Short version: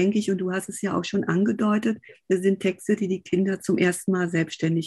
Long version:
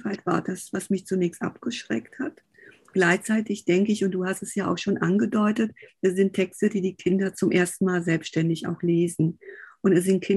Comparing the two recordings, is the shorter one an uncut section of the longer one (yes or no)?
yes